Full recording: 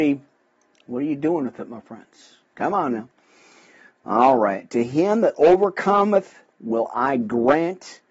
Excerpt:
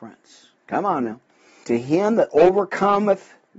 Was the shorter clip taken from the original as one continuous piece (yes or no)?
no